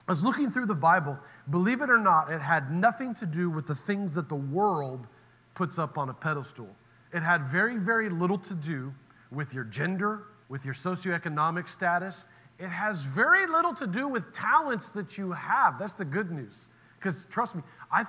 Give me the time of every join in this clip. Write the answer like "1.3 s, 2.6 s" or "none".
10.4 s

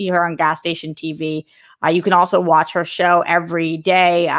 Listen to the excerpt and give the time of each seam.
none

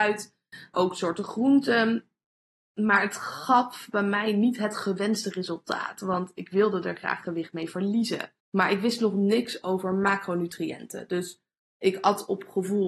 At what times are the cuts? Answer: 8.4 s

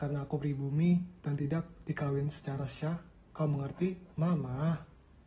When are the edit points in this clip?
4.1 s

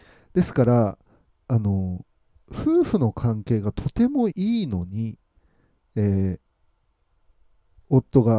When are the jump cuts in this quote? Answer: 4.3 s

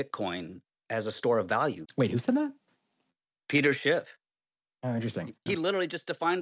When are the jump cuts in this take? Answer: 1.9 s, 5.5 s

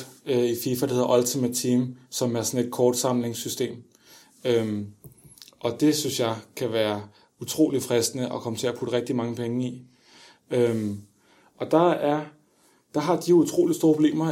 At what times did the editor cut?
none

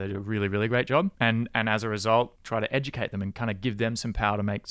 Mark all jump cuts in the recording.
none

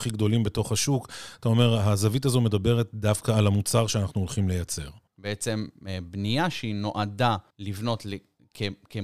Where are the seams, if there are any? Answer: 5.1 s, 7.5 s

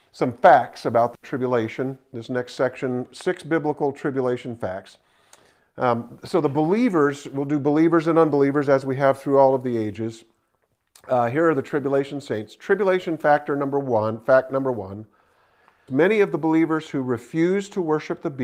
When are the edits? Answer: 15.9 s

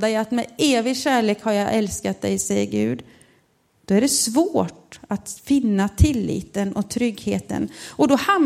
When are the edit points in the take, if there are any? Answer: none

